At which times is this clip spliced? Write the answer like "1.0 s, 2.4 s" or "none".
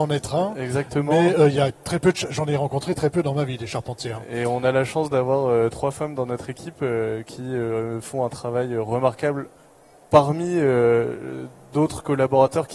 none